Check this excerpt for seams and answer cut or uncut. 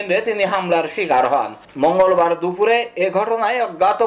uncut